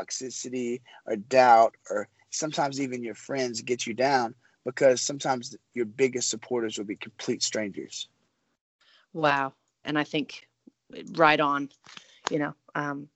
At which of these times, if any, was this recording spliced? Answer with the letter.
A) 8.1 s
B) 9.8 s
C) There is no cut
B